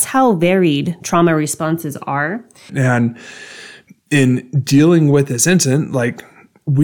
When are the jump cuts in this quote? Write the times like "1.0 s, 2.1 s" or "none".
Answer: 2.7 s